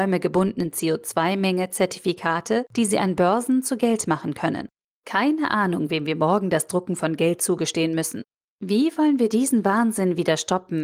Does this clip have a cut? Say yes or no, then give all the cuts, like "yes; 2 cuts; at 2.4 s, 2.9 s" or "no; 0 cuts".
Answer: no; 0 cuts